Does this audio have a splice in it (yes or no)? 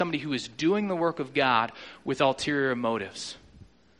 no